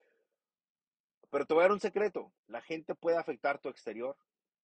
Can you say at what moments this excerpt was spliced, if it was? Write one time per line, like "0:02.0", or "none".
0:02.4